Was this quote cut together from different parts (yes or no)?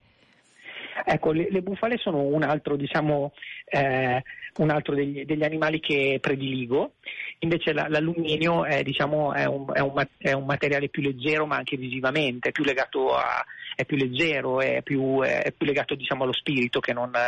yes